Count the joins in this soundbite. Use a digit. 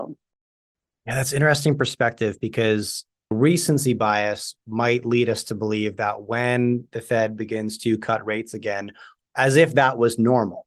2